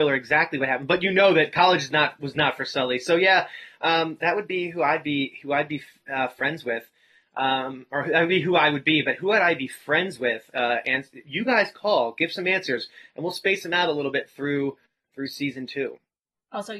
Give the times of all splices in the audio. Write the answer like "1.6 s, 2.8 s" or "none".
10.5 s